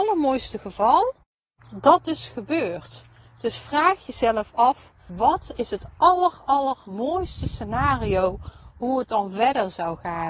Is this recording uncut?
no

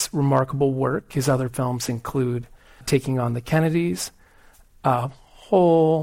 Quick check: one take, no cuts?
no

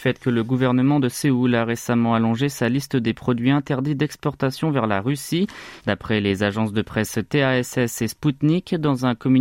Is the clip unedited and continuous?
no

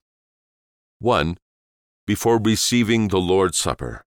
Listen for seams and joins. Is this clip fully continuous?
yes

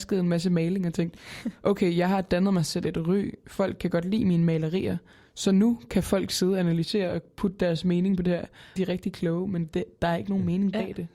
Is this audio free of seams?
no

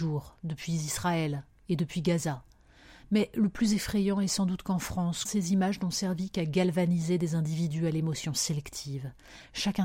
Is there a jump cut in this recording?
yes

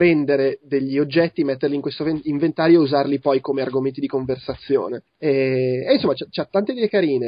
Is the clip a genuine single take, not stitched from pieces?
yes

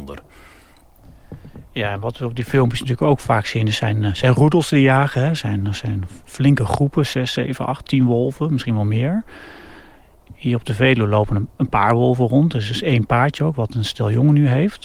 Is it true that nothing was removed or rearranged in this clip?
yes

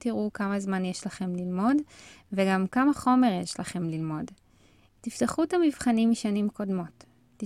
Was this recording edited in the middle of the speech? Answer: yes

